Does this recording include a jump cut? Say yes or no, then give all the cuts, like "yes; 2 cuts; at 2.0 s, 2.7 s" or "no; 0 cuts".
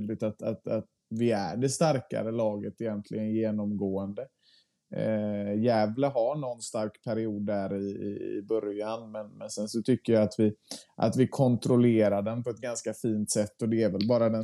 no; 0 cuts